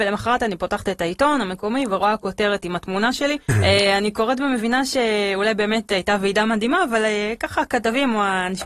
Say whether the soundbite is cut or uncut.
cut